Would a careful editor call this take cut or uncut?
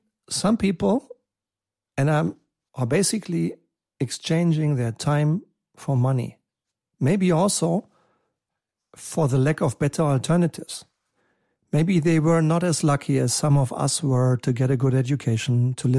cut